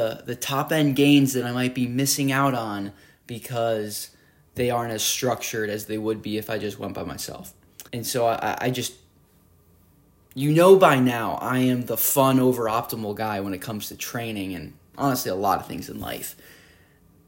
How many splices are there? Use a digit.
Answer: 1